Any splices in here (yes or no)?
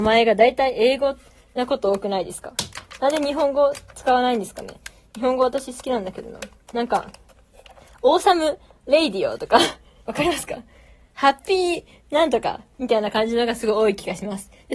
no